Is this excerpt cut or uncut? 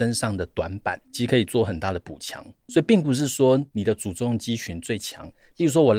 cut